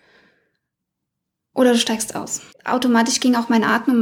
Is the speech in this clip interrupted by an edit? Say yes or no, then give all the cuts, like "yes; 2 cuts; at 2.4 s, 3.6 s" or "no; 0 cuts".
yes; 1 cut; at 2.5 s